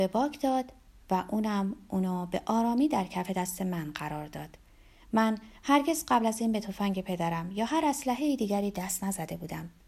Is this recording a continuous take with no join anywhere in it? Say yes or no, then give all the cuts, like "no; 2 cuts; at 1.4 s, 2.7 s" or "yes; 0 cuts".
yes; 0 cuts